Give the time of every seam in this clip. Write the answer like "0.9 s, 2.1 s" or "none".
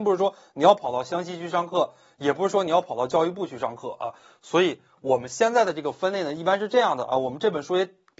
none